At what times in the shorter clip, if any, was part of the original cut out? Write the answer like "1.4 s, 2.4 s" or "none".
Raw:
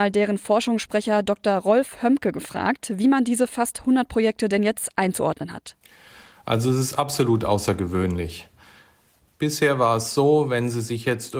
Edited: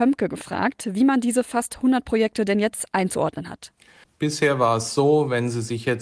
4.0 s